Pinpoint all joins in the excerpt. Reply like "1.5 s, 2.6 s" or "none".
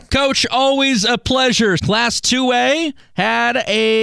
1.8 s